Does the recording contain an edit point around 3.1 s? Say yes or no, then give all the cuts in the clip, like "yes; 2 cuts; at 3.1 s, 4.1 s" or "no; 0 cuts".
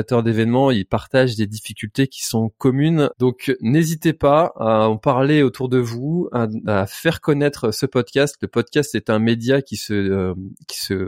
yes; 1 cut; at 3.1 s